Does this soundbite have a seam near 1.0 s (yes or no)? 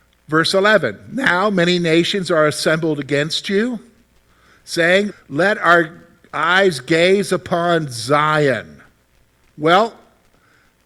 no